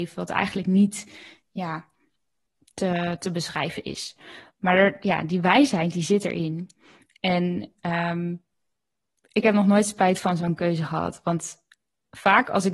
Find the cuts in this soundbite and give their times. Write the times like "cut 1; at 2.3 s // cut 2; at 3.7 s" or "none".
none